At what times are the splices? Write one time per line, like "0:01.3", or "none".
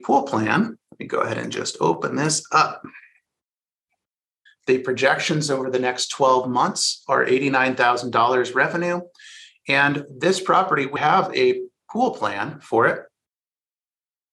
0:04.5
0:11.0